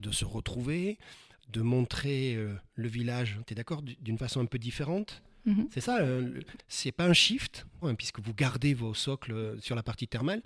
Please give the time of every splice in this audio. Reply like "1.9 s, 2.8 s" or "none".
6.6 s, 7.8 s